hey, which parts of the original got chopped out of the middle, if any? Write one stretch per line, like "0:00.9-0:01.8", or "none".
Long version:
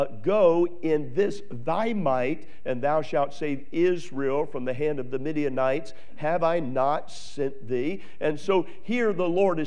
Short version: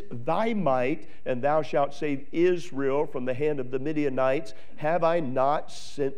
none